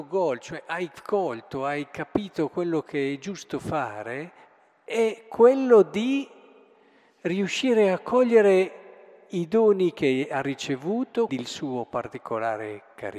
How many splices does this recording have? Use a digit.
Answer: 1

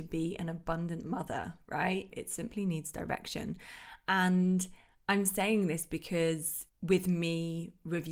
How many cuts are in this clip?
2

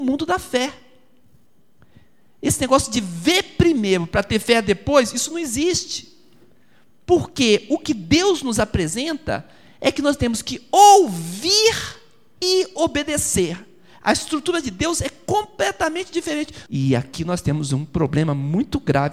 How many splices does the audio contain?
1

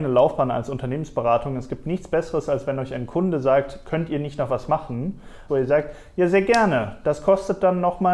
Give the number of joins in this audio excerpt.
1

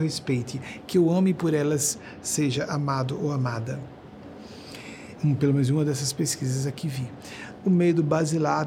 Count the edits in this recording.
1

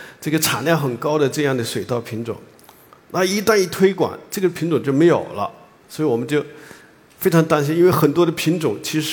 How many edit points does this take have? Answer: 0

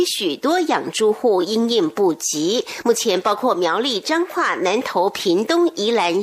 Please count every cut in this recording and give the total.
0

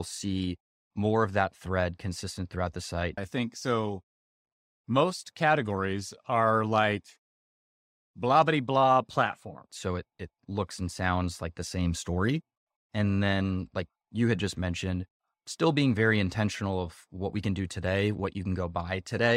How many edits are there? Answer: 2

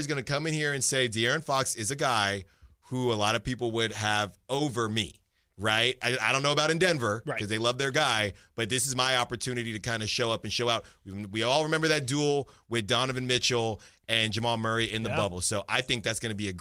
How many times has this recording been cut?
0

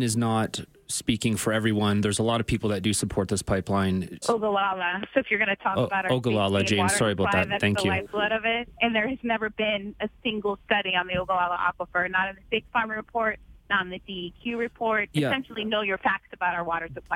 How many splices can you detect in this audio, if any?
2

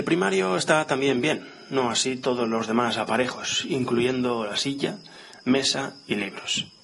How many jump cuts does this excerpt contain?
0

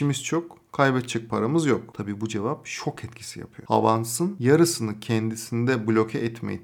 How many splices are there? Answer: 0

